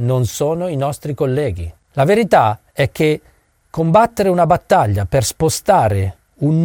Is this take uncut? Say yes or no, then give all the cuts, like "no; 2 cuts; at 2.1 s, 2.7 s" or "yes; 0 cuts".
yes; 0 cuts